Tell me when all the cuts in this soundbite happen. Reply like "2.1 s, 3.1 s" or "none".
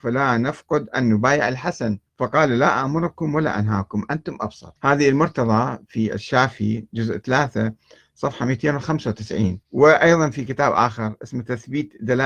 2.1 s, 4.8 s, 9.6 s